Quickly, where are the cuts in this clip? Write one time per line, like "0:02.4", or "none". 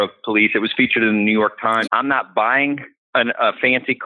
0:01.8